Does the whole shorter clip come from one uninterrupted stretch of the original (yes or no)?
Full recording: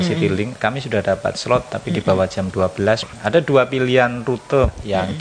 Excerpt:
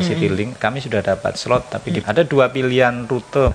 no